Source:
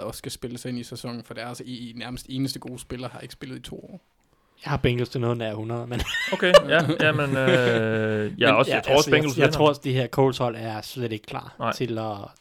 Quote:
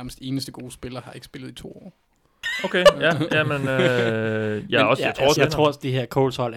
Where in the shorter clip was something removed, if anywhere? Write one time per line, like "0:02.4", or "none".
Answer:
0:02.4
0:05.4